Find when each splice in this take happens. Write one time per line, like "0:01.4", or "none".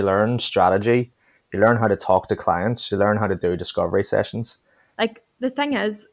0:04.9